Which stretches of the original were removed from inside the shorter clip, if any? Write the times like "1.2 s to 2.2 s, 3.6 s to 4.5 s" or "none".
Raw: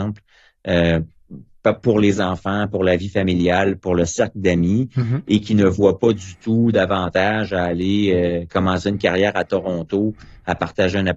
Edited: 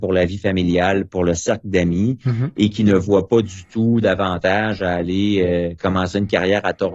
none